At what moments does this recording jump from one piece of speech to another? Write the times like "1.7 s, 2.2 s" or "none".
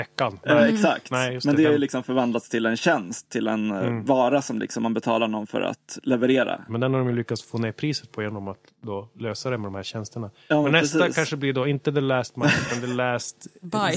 6.7 s